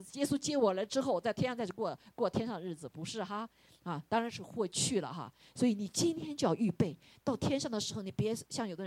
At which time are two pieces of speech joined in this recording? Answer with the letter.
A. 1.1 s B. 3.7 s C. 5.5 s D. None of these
D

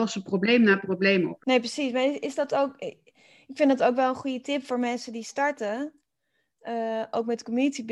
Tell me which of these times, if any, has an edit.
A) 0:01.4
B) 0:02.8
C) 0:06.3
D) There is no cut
A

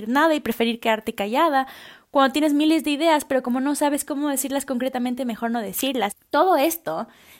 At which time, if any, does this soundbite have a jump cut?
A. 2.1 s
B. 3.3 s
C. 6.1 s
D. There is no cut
C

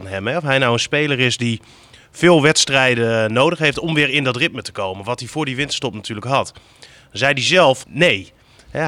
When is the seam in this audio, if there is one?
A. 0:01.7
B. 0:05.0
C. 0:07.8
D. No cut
C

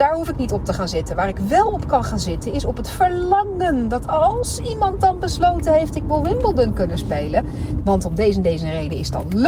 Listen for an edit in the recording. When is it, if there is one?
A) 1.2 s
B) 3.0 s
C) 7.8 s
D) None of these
C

